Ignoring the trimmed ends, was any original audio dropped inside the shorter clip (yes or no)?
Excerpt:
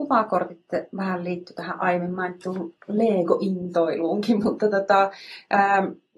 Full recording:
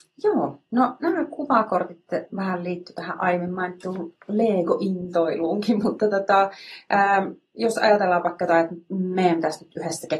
no